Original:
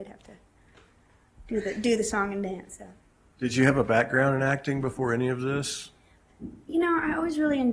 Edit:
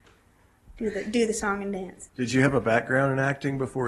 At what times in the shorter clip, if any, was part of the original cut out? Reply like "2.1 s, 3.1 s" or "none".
2.1 s